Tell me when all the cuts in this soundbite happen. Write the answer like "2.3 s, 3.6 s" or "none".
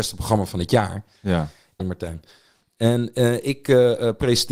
1.8 s